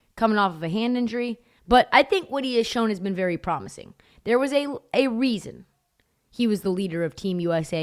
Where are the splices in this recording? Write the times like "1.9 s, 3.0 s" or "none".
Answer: 1.6 s